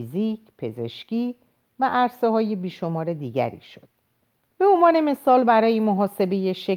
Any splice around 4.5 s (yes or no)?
yes